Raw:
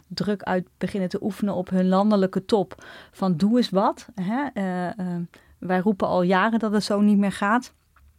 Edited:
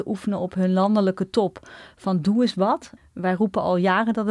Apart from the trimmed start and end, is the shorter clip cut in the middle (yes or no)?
yes